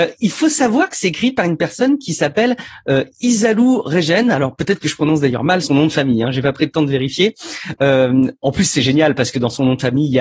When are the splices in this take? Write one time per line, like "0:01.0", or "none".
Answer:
0:05.6